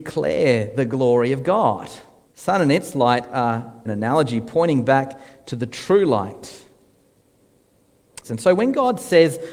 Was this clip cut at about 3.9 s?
yes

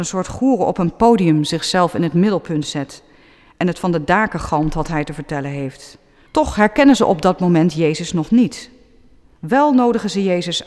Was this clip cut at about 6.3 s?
yes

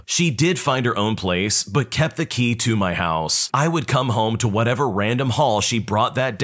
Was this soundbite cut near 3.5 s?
yes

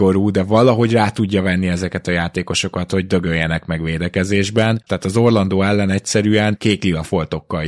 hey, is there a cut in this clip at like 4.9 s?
yes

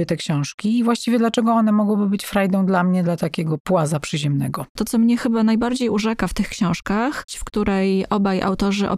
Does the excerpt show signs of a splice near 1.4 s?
no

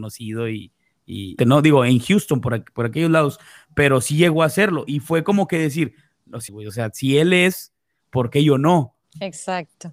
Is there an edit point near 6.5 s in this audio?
yes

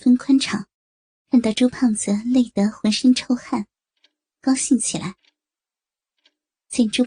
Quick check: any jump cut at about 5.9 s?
no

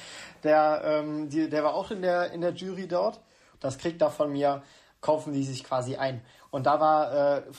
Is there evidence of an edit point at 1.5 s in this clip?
no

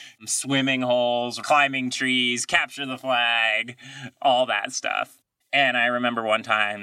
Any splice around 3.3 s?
no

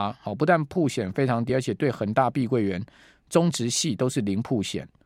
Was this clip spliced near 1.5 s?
no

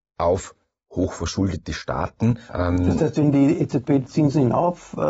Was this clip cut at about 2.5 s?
yes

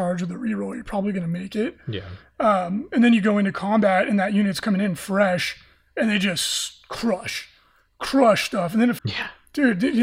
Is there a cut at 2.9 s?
no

